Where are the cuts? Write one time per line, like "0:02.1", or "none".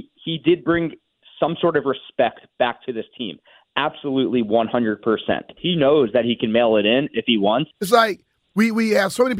0:05.6
0:07.7